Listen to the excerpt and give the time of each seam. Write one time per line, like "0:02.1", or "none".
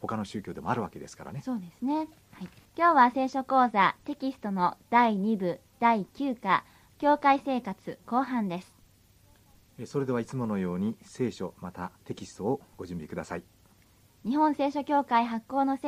0:02.7
0:12.0